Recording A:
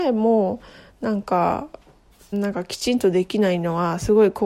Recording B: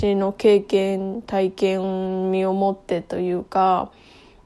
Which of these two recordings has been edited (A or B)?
A